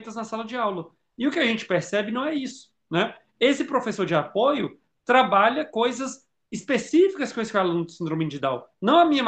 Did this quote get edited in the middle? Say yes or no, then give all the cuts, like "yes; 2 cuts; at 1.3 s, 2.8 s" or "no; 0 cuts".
no; 0 cuts